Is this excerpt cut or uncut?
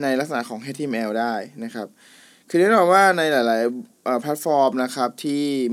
uncut